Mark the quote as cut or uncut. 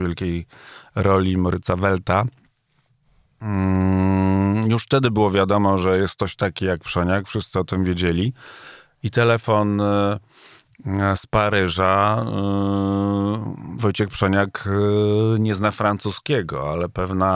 uncut